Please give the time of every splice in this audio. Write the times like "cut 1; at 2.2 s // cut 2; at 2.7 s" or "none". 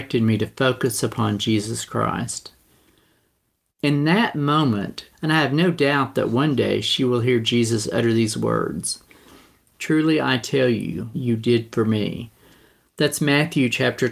cut 1; at 5.1 s // cut 2; at 11.1 s